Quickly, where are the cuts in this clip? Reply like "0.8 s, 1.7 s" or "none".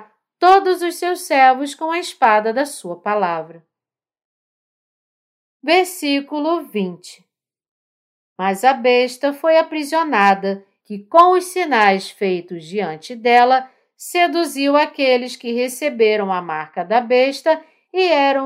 10.8 s

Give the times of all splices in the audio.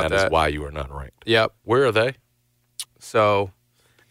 1.6 s, 2.8 s

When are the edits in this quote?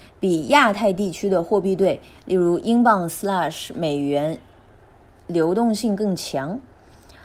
none

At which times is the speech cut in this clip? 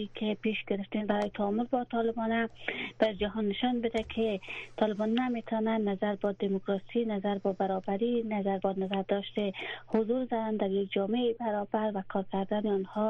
8.6 s

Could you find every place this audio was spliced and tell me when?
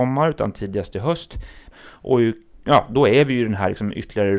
1.7 s

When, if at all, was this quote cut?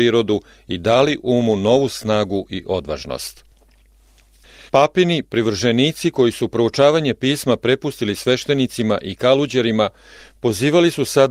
4.7 s

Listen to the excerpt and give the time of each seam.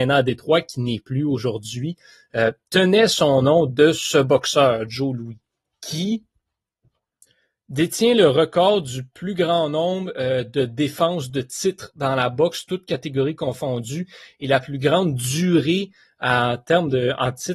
none

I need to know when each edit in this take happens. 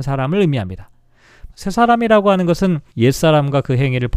1.5 s, 2.9 s

